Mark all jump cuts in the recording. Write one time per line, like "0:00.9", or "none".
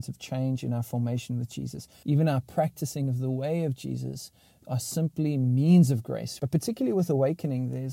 0:02.0
0:06.4